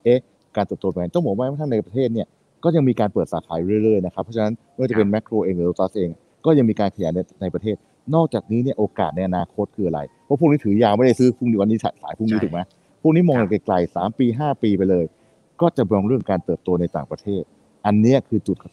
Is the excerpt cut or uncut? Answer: uncut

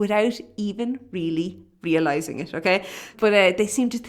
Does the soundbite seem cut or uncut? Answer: cut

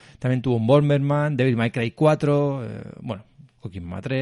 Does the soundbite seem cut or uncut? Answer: uncut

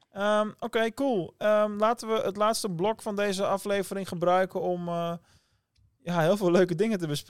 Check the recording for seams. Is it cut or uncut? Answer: uncut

